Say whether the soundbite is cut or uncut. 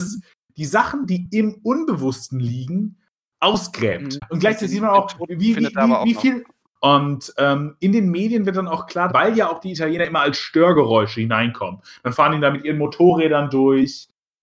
cut